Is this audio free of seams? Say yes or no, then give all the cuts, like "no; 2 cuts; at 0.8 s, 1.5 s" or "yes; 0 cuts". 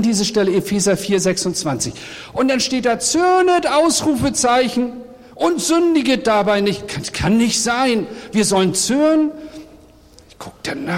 yes; 0 cuts